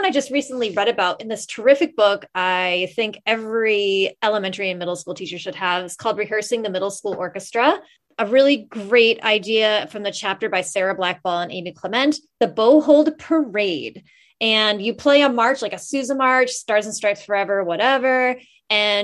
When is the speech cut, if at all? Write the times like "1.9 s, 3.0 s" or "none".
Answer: none